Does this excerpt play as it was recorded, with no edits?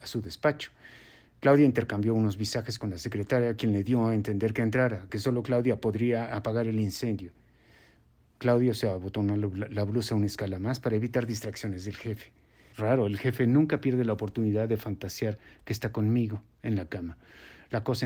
no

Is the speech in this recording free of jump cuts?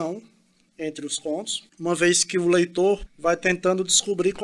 no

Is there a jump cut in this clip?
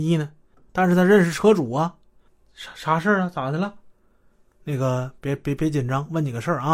no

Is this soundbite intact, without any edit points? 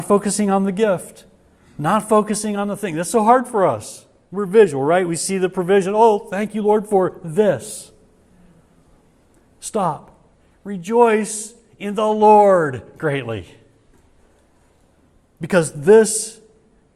yes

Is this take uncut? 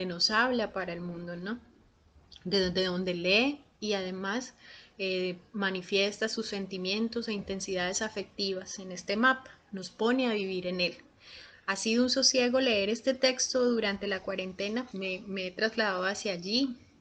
no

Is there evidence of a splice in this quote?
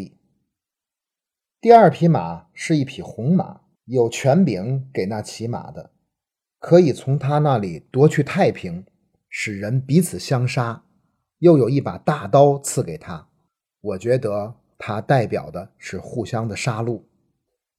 no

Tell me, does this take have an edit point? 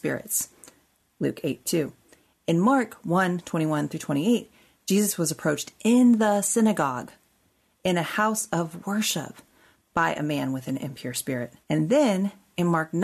yes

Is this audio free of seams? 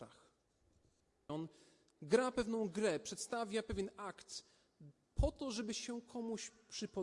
no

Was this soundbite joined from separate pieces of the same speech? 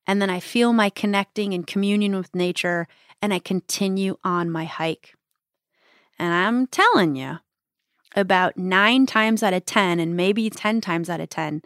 yes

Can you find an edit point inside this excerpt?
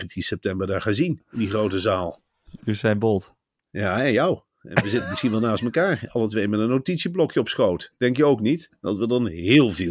no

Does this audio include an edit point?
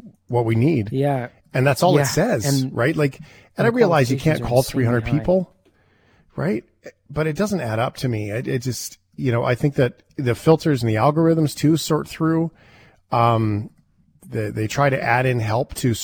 no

